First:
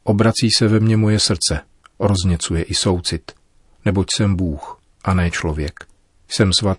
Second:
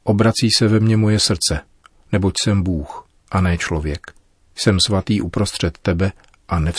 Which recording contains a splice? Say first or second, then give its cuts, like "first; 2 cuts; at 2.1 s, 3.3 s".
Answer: second; 1 cut; at 1.9 s